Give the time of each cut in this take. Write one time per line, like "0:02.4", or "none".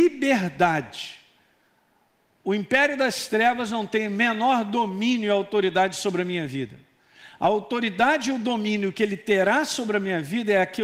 none